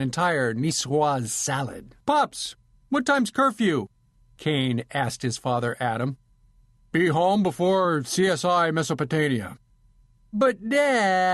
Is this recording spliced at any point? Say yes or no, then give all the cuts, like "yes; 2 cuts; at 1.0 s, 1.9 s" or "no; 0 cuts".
yes; 1 cut; at 2.0 s